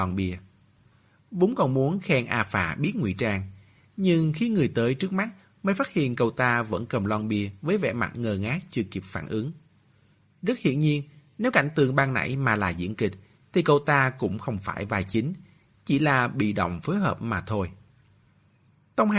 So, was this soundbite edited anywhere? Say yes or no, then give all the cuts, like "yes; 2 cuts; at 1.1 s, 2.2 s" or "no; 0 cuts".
no; 0 cuts